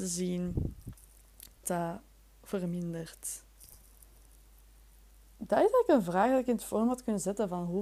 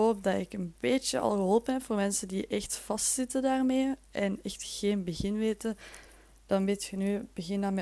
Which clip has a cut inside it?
first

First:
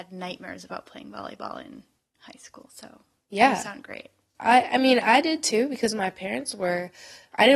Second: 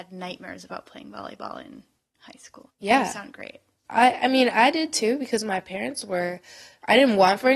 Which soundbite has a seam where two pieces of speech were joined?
second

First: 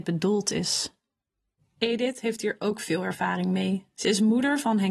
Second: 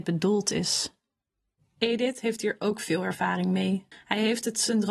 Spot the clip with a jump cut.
second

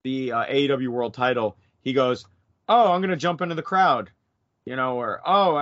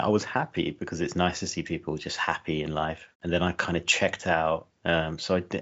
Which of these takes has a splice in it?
second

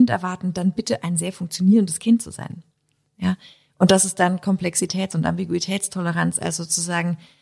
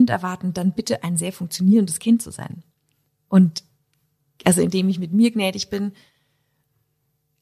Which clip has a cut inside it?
first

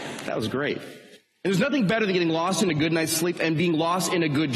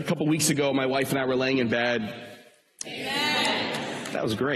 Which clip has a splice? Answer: second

